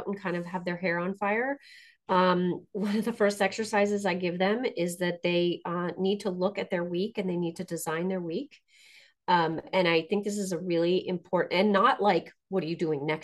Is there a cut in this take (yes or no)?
no